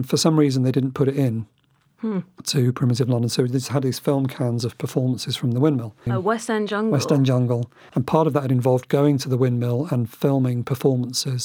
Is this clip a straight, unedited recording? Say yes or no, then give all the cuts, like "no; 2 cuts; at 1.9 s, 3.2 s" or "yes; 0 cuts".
no; 2 cuts; at 6.1 s, 7.9 s